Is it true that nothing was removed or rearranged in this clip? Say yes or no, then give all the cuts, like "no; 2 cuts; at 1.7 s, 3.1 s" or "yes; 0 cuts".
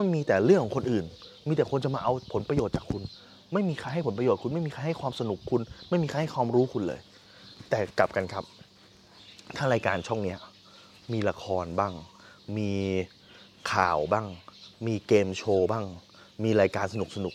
yes; 0 cuts